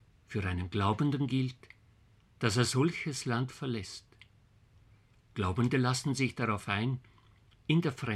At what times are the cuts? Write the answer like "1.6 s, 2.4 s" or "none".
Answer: none

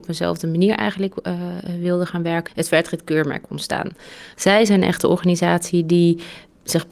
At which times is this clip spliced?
2.5 s

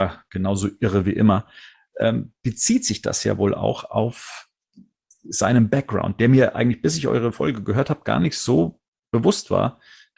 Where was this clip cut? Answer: none

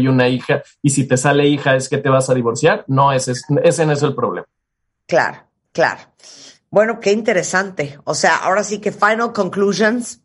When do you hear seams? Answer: 7.0 s

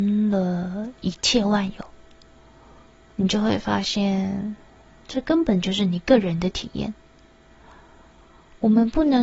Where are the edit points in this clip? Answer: none

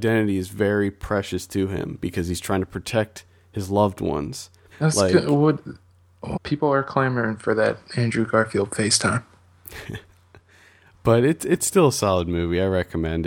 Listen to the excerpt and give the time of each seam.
4.7 s, 6.3 s

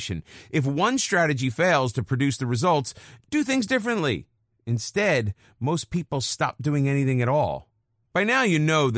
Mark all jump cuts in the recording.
8.0 s

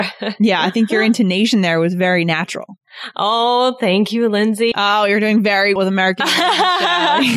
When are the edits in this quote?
4.7 s, 5.8 s

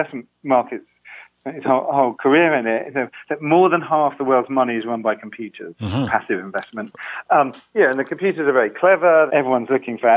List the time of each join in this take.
9.3 s

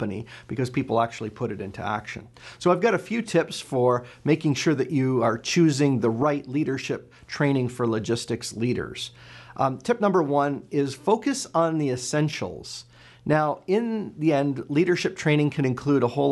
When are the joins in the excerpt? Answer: none

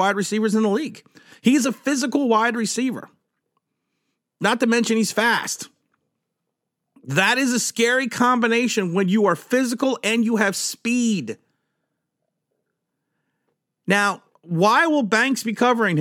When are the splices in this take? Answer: none

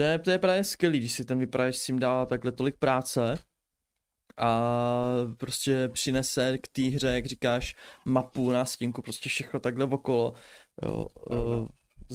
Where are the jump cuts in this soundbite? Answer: 10.7 s

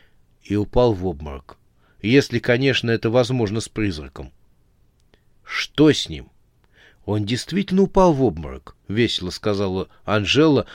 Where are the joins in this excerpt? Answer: 8.8 s

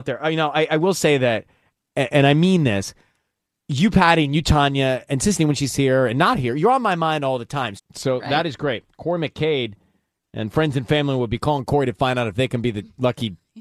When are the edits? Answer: 7.8 s

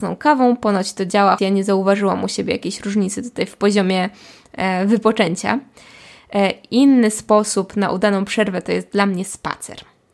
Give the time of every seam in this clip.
1.4 s

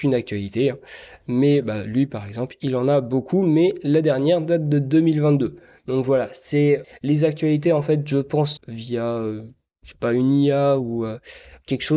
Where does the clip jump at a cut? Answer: 6.8 s, 8.6 s

